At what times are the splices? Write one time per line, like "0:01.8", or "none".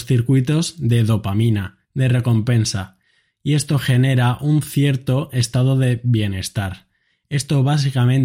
none